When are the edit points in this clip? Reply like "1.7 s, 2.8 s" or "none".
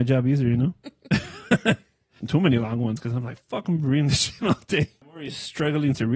2.2 s